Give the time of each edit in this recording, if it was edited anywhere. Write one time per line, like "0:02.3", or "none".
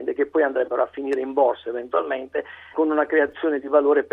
0:02.7